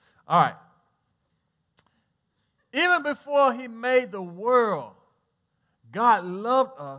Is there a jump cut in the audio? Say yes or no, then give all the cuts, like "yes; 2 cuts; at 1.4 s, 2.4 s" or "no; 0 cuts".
no; 0 cuts